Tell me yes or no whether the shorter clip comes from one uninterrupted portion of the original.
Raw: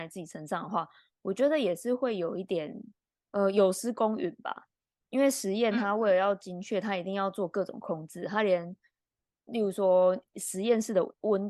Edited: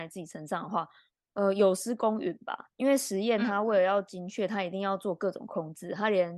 no